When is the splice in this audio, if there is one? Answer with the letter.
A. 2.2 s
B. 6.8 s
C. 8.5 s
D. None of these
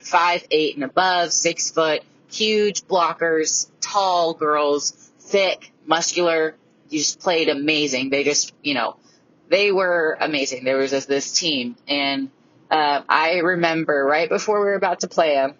D